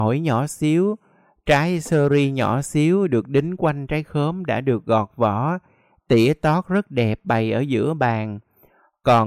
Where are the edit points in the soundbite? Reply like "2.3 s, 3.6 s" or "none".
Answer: none